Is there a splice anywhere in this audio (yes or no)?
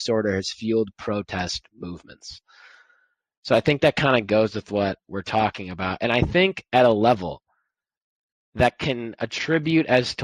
no